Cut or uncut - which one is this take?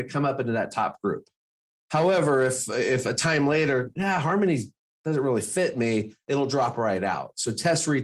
uncut